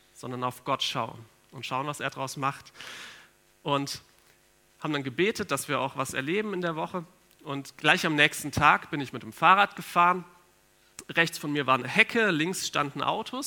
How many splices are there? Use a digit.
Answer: 0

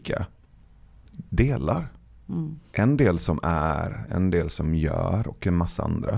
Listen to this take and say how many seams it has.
0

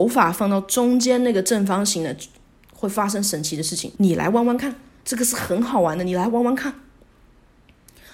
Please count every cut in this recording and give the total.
1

